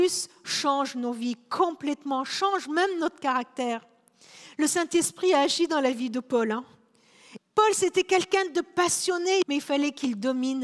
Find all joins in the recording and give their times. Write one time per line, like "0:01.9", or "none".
0:07.4
0:09.4